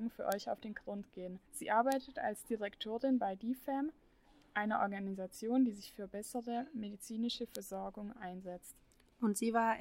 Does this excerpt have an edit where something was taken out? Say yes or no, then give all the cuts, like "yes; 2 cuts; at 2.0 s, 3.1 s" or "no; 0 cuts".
yes; 1 cut; at 1.4 s